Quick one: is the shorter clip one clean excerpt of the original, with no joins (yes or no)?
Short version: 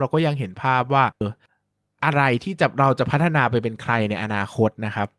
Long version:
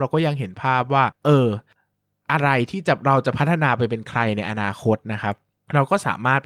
no